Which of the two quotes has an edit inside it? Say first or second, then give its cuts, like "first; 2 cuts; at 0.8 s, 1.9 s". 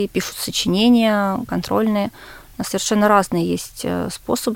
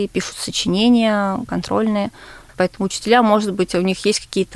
second; 1 cut; at 2.5 s